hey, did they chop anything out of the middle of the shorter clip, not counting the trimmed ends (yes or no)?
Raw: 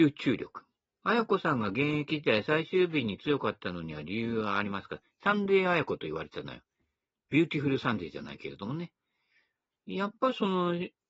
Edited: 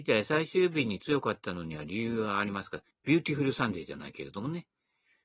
yes